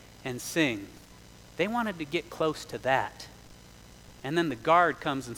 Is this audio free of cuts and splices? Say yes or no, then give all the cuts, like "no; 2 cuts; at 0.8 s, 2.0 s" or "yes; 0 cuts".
yes; 0 cuts